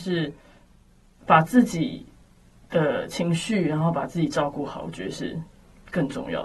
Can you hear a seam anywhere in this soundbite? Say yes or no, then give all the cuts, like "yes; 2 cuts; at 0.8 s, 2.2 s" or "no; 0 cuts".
no; 0 cuts